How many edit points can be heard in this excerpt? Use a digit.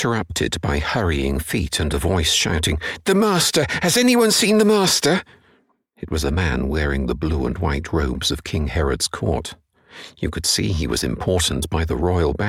0